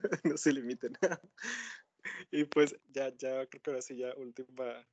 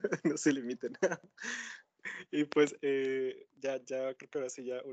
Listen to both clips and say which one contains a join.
first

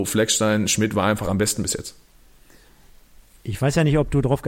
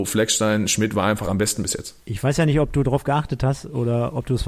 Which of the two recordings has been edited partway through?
second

